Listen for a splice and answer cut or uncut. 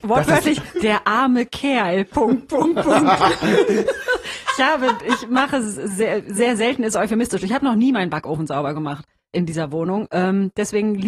uncut